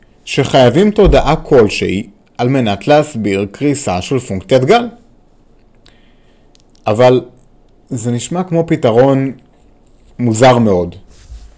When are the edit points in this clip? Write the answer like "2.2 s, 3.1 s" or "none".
none